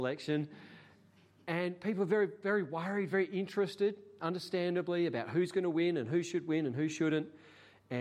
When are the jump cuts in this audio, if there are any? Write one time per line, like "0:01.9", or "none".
none